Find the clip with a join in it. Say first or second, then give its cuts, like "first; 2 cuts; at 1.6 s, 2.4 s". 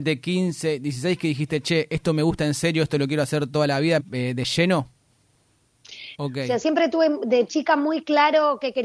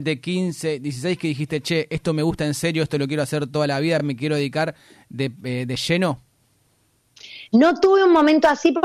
first; 2 cuts; at 4.0 s, 6.2 s